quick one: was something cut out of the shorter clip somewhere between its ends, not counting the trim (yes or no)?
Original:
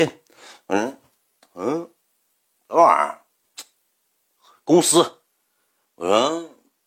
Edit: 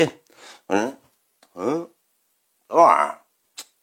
no